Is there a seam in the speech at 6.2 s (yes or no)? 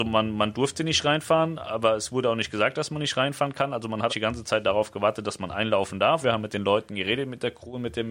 yes